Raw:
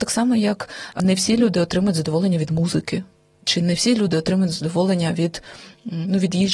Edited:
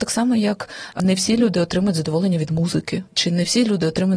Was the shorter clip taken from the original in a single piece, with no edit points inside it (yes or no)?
no